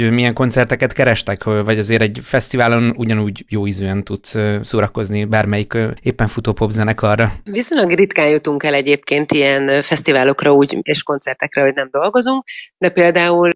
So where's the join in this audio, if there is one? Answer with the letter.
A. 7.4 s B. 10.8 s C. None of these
C